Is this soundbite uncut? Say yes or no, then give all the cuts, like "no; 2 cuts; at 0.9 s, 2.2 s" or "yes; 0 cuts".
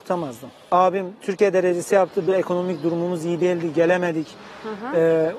no; 1 cut; at 2.3 s